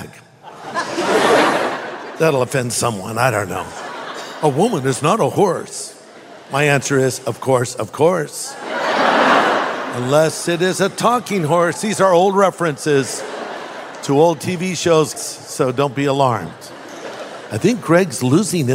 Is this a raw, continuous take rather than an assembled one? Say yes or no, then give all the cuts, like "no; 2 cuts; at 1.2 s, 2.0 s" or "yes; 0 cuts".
no; 1 cut; at 15.1 s